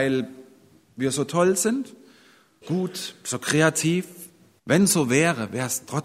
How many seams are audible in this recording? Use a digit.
2